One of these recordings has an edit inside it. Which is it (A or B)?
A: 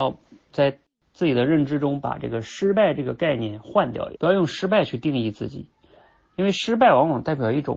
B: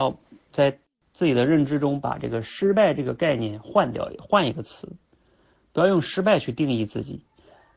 A